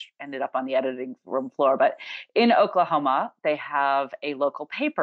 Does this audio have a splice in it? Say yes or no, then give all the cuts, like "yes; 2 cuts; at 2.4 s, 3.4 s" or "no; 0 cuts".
no; 0 cuts